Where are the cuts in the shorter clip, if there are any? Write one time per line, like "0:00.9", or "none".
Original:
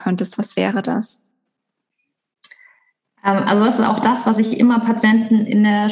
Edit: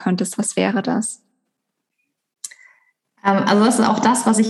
none